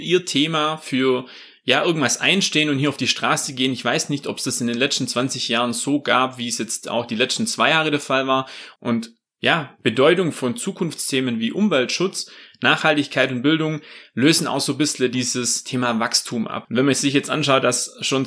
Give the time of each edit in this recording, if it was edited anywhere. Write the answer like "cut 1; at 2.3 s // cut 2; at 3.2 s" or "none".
cut 1; at 8.8 s // cut 2; at 16.6 s